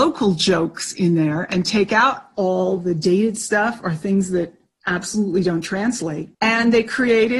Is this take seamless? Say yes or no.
no